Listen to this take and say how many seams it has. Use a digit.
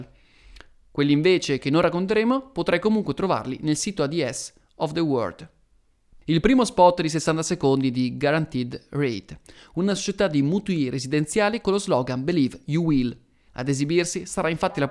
2